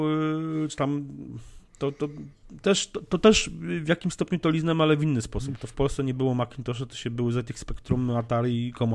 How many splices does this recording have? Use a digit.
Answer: 0